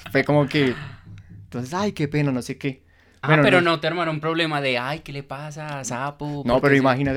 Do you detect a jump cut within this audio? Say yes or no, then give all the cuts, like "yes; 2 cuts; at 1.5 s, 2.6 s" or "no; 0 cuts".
no; 0 cuts